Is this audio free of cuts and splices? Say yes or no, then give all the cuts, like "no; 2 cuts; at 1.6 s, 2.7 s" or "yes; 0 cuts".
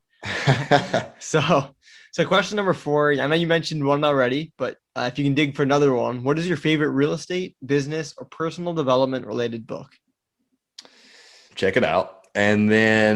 no; 1 cut; at 11.5 s